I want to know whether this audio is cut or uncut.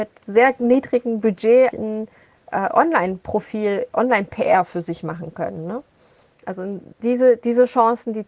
cut